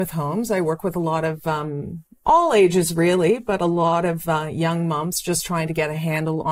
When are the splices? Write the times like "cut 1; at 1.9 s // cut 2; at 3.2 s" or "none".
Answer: none

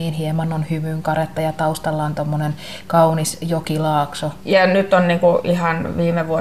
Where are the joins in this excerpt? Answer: cut 1; at 4.4 s

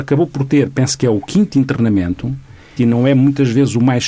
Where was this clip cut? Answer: cut 1; at 2.8 s

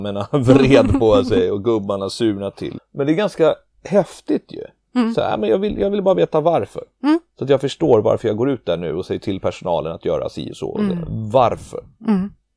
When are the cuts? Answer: cut 1; at 2.8 s

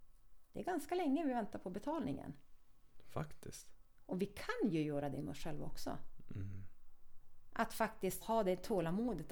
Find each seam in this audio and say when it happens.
cut 1; at 8.2 s

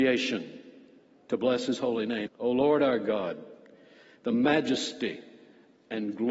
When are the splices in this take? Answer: cut 1; at 2.3 s

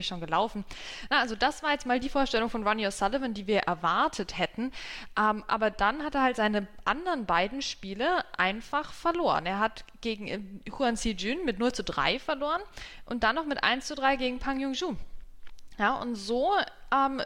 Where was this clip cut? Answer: none

